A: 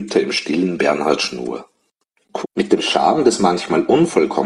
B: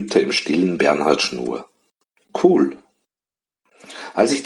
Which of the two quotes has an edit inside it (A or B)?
A